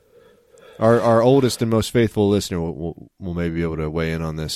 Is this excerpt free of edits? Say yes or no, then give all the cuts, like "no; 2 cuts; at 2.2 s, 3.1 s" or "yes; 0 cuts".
yes; 0 cuts